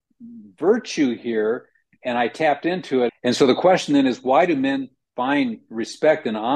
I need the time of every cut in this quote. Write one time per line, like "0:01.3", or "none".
0:03.1

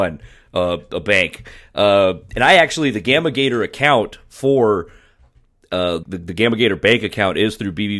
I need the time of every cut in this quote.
0:06.0

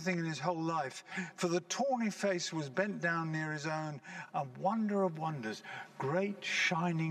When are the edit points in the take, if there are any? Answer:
none

